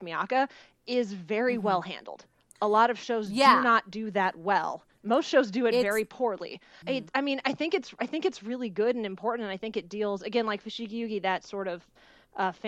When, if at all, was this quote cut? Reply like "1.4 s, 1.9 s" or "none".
6.8 s

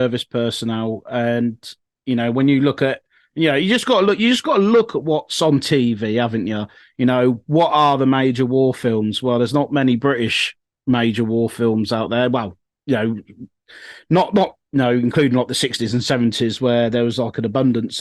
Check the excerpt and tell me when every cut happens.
12.8 s

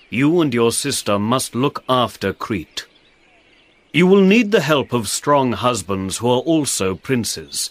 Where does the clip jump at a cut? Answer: none

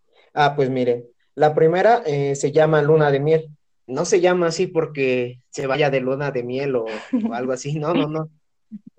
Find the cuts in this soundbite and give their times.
3.9 s

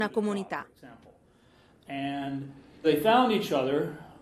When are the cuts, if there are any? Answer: 2.8 s

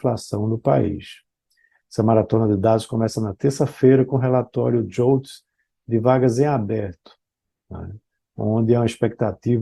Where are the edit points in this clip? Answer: none

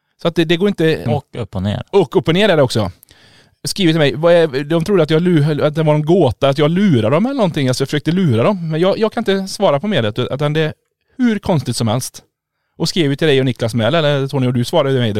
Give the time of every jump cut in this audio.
1.1 s

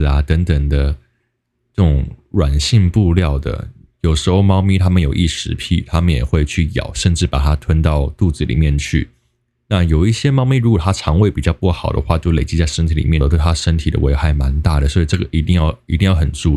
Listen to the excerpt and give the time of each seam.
13.2 s

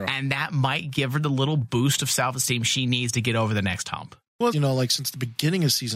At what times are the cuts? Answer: 4.5 s

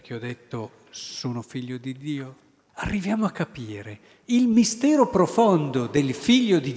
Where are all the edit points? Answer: 2.7 s

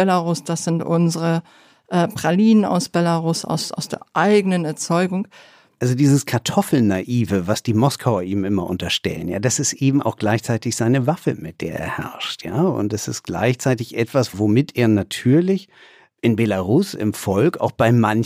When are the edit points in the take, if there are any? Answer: 5.8 s

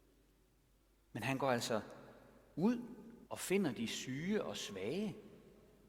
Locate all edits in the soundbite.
3.3 s

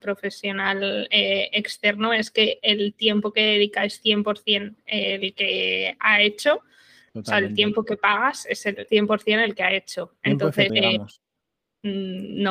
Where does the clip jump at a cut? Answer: 8.9 s, 10.7 s

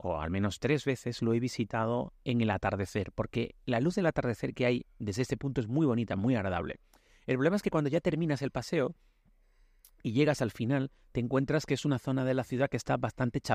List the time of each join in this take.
none

